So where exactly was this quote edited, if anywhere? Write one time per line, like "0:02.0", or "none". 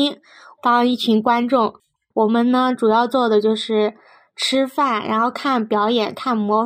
none